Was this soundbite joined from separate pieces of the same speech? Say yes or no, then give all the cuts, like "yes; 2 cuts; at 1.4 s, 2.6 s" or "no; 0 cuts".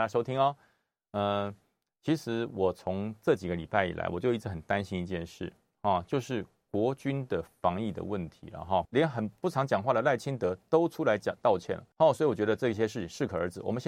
yes; 2 cuts; at 8.8 s, 11.9 s